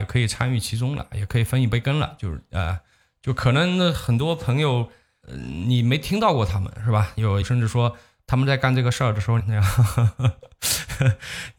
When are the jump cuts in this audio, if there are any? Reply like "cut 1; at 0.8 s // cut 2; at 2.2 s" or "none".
cut 1; at 2.2 s // cut 2; at 7.4 s // cut 3; at 9.4 s